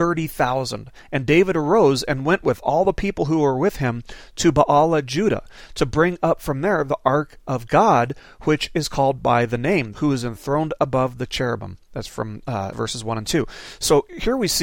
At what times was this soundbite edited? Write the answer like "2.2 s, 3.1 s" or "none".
9.9 s, 12.7 s